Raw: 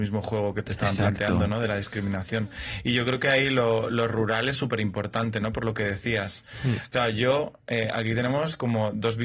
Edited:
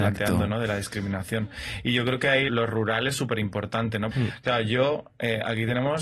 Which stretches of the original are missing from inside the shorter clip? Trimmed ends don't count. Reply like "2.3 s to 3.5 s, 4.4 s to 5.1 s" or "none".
3.5 s to 3.9 s, 5.5 s to 6.6 s